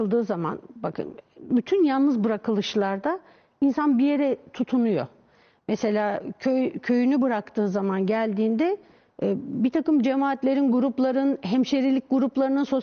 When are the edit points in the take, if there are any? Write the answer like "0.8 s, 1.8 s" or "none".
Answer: none